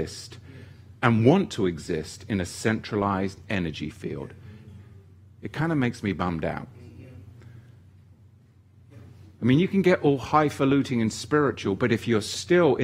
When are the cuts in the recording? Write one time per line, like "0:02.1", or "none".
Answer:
none